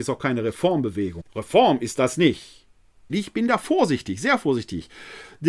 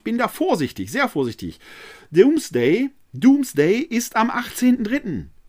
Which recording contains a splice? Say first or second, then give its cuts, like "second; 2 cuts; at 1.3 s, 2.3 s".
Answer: first; 2 cuts; at 1.2 s, 3.1 s